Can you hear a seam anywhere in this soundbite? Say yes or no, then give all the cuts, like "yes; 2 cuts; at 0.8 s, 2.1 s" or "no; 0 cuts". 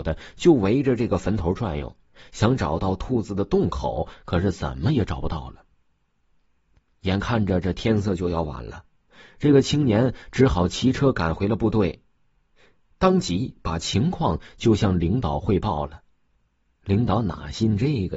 no; 0 cuts